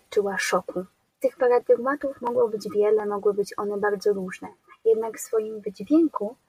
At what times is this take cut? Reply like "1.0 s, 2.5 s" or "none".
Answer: 1.1 s